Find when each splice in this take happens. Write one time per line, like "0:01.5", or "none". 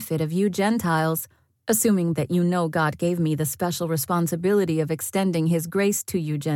0:02.1